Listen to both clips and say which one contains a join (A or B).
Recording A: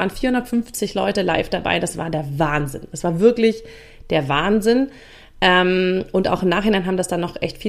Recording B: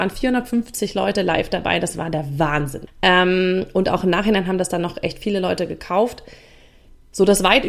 B